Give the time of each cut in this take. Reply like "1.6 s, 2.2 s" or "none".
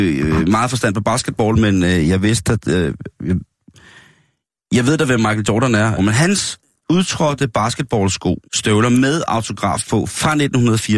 6.0 s, 8.4 s